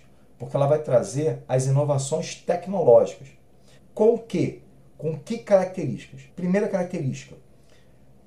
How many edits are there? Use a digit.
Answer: 2